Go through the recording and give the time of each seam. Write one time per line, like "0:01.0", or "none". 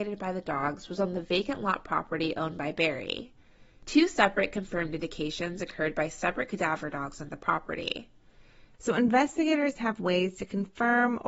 0:08.7